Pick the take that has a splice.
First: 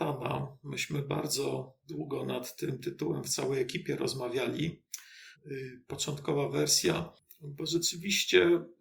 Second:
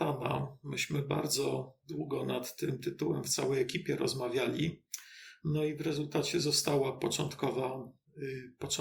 first; 1 cut; at 5.3 s

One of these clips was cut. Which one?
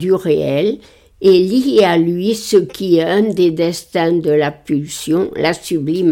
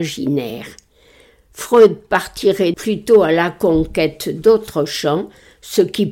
second; 1 cut; at 2.7 s

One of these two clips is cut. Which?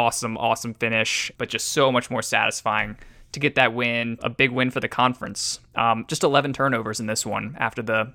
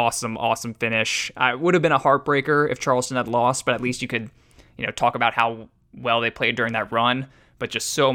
first; 3 cuts; at 1.3 s, 4.2 s, 6.1 s

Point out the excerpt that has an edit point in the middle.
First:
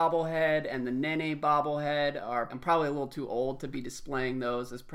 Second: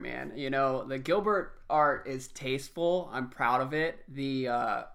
first; 1 cut; at 2.5 s

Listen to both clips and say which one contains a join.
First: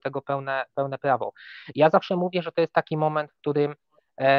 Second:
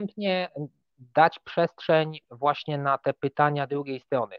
first; 1 cut; at 1.7 s

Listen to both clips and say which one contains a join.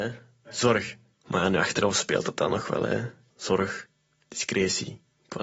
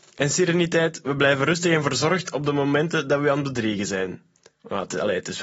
first; 2 cuts; at 1.2 s, 3.3 s

